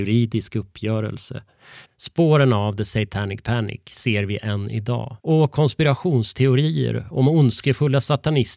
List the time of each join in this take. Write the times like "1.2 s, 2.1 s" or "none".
1.9 s, 5.2 s